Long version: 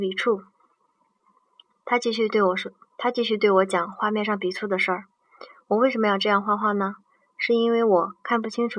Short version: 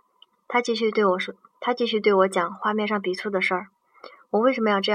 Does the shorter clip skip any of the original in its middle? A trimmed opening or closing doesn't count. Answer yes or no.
no